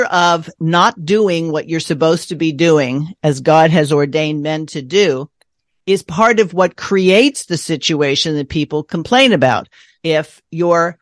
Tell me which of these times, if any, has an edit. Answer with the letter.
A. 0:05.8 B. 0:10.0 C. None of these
B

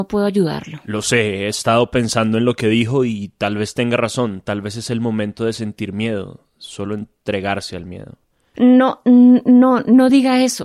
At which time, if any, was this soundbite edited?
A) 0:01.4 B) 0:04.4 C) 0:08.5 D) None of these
C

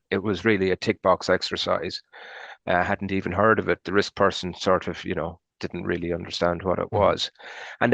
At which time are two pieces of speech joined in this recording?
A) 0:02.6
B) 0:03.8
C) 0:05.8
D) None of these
A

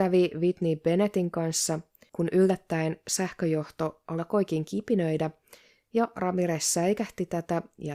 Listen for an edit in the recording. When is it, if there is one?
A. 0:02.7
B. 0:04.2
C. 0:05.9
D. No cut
D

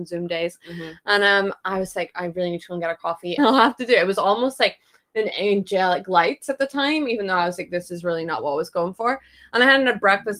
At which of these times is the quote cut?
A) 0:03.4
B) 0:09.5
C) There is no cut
A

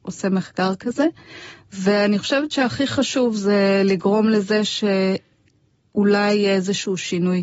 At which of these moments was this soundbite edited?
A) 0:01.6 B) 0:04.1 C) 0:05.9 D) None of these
D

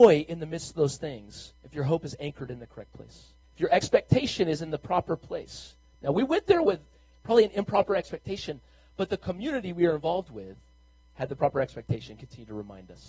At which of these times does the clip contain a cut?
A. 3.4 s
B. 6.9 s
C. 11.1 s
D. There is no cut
A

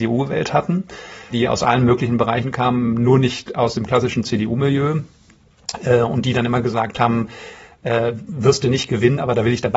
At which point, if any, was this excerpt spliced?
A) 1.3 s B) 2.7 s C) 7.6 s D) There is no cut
A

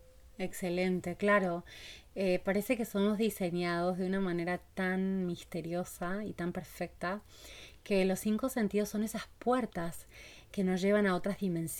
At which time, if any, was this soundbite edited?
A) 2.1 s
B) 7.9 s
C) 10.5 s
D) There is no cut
C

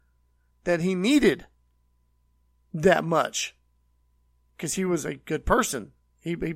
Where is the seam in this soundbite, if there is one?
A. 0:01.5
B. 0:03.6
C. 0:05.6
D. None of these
D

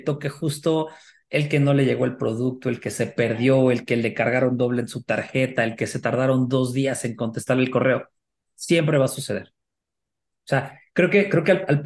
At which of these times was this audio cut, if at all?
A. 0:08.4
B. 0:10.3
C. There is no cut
B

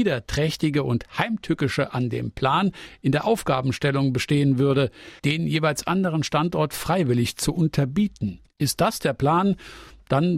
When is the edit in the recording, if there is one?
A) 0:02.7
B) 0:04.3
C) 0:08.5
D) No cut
C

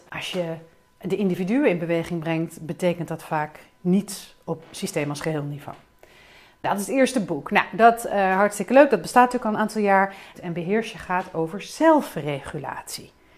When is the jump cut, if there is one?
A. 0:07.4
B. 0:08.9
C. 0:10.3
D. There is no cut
C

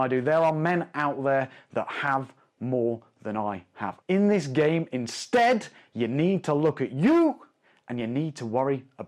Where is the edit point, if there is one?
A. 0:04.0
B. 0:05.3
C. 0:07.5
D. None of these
A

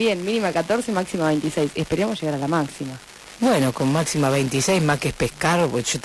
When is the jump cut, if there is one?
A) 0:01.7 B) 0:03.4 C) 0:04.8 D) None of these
D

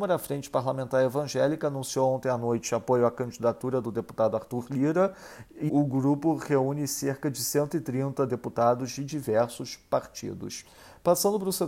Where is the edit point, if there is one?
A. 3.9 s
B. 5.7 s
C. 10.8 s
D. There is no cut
B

